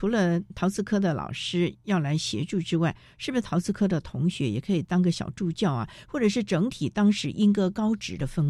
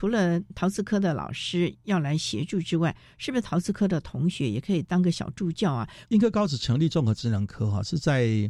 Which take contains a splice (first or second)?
second